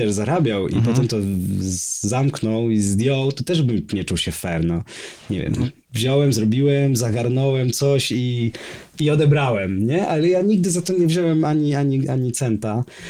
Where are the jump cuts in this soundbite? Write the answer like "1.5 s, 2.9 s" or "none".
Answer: none

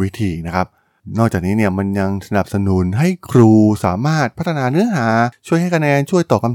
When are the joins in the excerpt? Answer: none

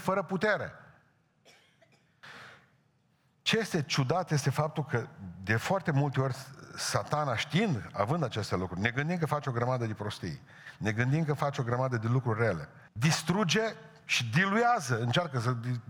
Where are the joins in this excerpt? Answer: 12.9 s

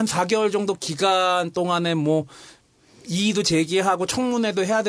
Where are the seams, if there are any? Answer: none

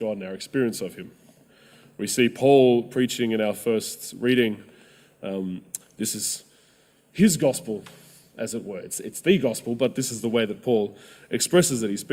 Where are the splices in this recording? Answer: none

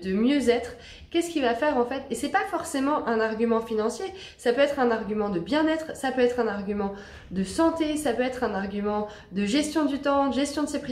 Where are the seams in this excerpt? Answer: 1.1 s

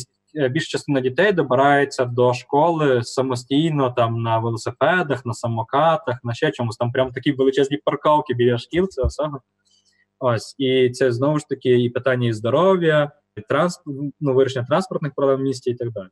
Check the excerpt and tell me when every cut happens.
13.4 s

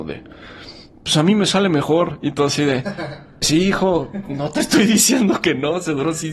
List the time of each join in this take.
3.4 s

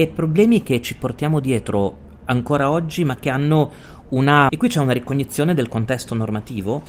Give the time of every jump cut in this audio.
4.5 s

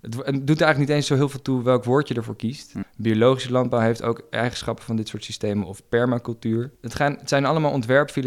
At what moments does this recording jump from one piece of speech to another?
2.8 s, 6.7 s

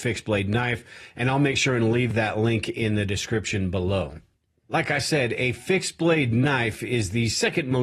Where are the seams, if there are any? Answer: none

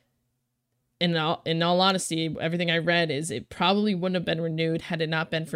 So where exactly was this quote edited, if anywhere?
none

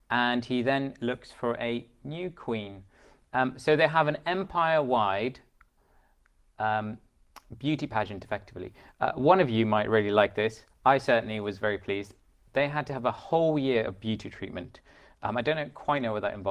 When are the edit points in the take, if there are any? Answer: none

